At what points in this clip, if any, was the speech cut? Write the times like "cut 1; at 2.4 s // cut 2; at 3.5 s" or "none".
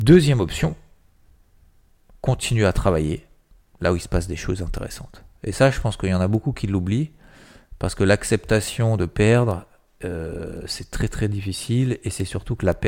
none